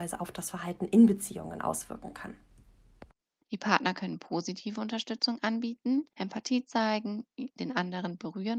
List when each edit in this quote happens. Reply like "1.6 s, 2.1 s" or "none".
3.4 s, 6.1 s